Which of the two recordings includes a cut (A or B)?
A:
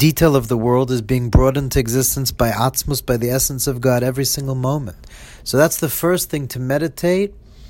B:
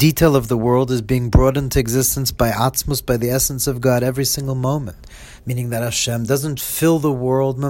B